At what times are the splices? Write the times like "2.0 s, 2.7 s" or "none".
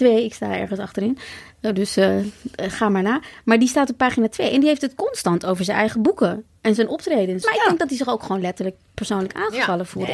7.4 s